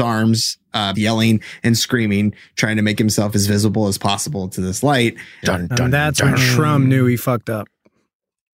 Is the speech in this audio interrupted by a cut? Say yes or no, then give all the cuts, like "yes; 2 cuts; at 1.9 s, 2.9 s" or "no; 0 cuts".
yes; 2 cuts; at 0.9 s, 5.4 s